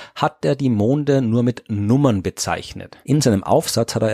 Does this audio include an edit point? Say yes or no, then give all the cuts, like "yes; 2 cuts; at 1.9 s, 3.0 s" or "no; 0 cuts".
yes; 1 cut; at 3.0 s